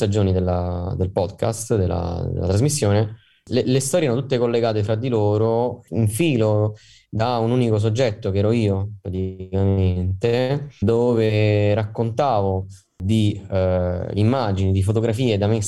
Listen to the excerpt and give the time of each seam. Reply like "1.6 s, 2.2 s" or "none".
10.8 s